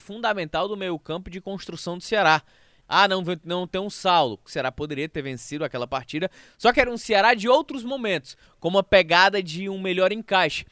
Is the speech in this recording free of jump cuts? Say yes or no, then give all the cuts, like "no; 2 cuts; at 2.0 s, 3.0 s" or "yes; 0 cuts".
no; 3 cuts; at 2.8 s, 4.5 s, 8.5 s